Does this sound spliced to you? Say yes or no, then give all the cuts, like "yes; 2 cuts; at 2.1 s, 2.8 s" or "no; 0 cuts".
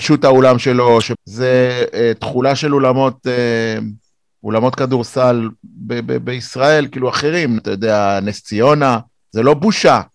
yes; 2 cuts; at 1.1 s, 7.6 s